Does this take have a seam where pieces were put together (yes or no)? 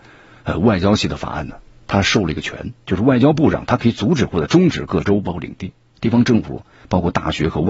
no